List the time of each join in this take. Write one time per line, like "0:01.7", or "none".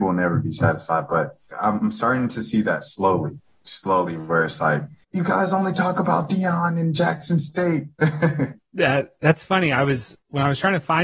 none